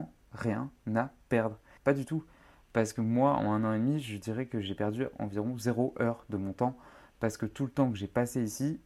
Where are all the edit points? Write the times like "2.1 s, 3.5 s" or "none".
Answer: 1.8 s